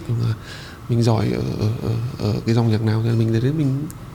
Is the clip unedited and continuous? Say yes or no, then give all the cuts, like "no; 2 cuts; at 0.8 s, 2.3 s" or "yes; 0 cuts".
yes; 0 cuts